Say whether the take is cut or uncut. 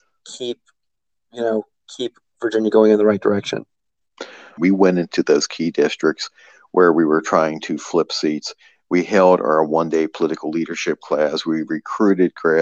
cut